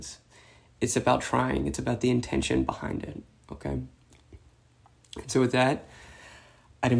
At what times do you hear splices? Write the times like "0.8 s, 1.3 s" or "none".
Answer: none